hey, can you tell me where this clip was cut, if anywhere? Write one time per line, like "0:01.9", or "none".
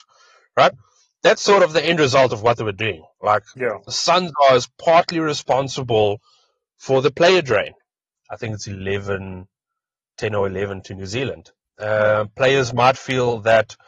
0:08.2
0:11.6